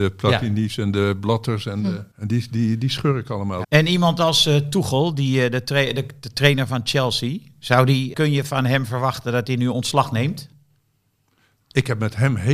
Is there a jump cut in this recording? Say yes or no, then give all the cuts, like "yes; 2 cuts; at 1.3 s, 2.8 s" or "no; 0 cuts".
yes; 3 cuts; at 2.1 s, 3.6 s, 8.1 s